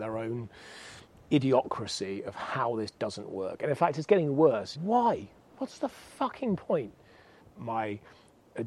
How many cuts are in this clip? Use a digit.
2